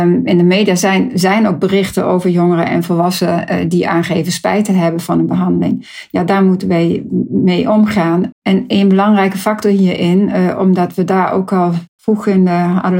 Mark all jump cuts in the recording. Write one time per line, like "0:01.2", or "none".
0:08.3